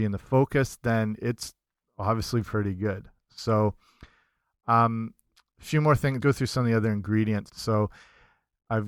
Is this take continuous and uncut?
no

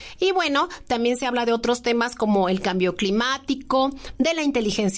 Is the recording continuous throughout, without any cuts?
yes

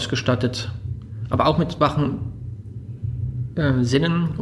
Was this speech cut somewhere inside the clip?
no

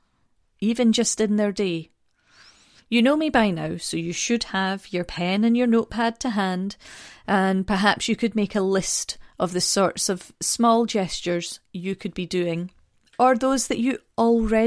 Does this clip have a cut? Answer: no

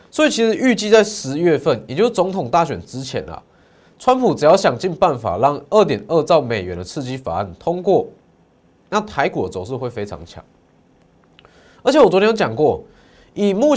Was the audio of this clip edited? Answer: no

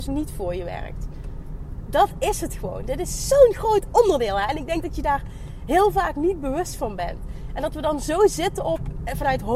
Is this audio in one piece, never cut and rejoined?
yes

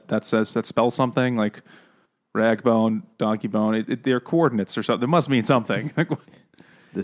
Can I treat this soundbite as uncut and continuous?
yes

